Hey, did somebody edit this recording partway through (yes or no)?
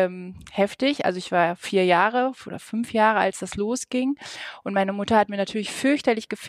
no